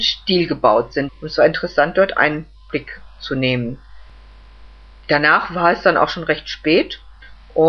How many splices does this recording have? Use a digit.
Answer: 1